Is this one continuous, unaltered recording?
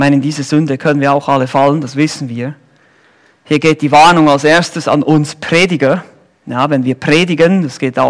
yes; 0 cuts

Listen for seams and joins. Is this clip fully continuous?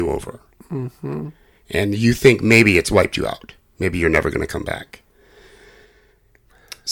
yes; 0 cuts

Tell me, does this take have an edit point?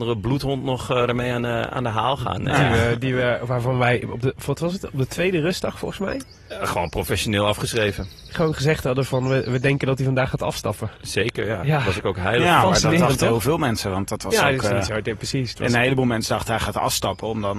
no; 0 cuts

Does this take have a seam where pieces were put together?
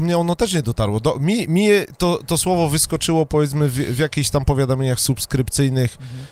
no; 0 cuts

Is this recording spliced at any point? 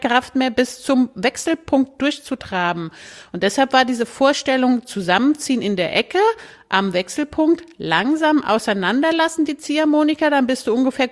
no; 0 cuts

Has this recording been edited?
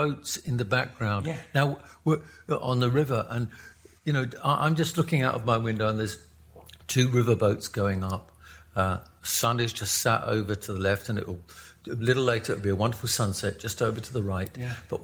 no; 0 cuts

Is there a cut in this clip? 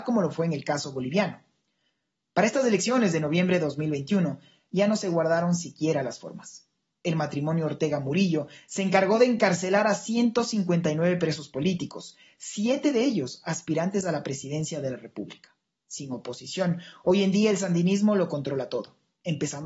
no; 0 cuts

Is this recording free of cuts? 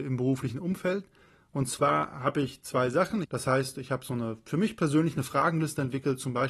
no; 1 cut; at 3.2 s

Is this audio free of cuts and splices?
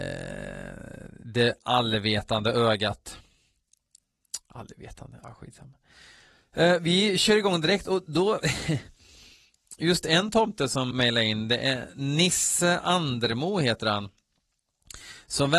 no; 1 cut; at 10.9 s

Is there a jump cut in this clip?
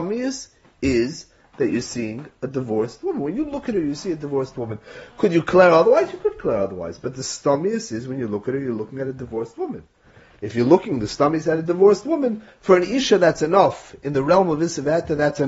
no; 0 cuts

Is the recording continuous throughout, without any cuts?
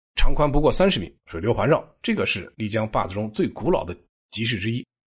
no; 1 cut; at 1.2 s

